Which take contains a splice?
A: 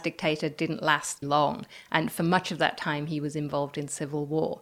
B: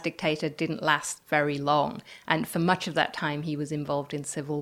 A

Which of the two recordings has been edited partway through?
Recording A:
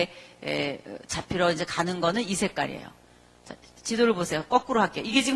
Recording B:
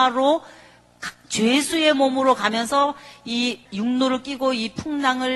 B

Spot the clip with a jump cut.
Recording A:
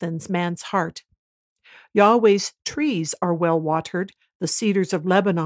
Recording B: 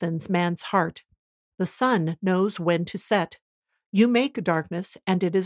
B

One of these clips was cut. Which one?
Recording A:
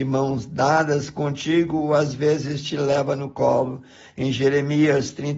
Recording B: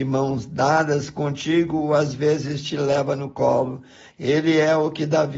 B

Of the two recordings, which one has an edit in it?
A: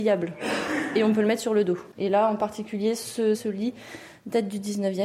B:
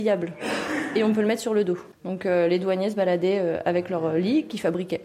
A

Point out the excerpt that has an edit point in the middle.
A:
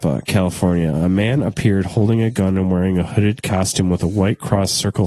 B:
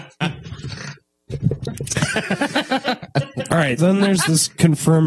B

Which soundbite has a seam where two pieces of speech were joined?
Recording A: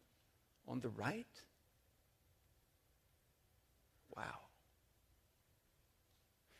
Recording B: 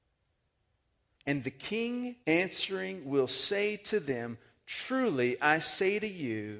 B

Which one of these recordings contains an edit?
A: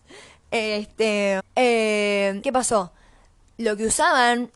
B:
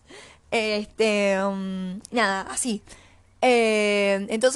A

